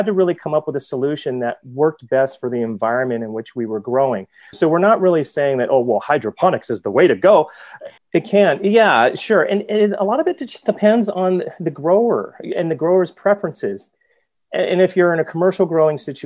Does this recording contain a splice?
yes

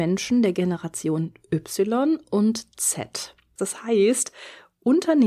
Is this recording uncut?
no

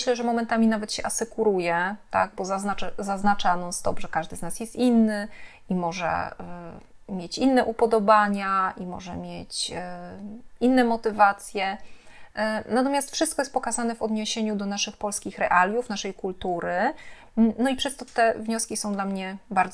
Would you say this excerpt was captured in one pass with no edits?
yes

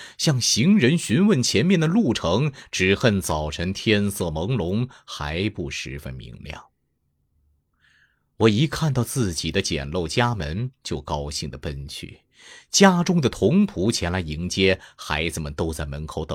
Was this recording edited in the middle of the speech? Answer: no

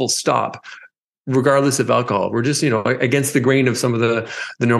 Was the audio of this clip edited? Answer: no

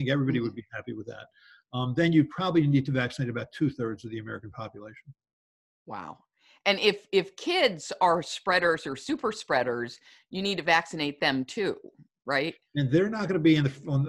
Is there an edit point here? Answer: no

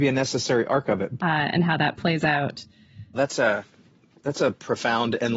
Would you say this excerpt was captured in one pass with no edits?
no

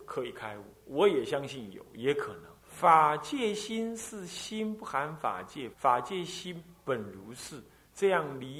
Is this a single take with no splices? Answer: no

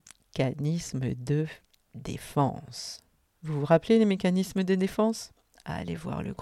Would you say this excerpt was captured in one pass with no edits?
no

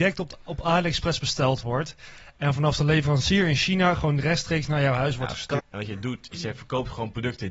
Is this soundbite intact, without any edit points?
no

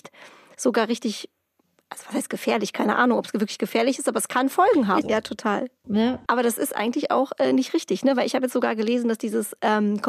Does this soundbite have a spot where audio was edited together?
yes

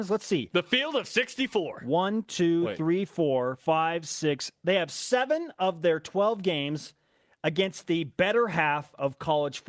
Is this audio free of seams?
yes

